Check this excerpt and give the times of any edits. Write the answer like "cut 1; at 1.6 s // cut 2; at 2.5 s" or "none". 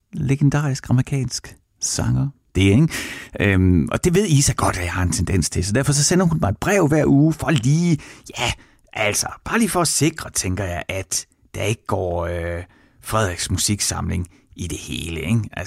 cut 1; at 2.5 s